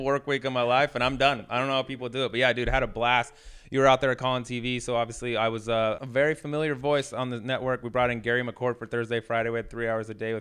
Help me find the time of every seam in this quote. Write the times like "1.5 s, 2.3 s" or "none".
6.0 s